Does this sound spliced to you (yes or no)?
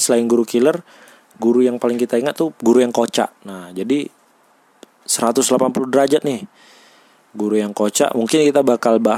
yes